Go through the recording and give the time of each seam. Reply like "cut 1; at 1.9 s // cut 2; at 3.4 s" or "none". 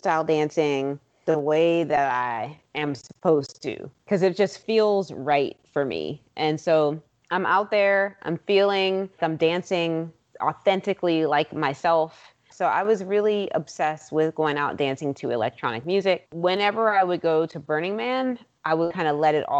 cut 1; at 9.2 s // cut 2; at 12.5 s